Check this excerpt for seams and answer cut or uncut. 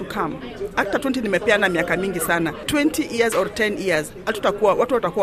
uncut